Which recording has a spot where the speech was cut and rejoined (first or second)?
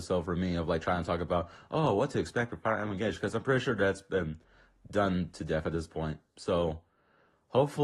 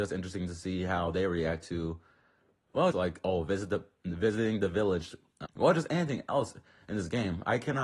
second